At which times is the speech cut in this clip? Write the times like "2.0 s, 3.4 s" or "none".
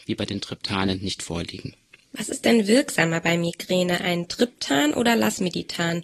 none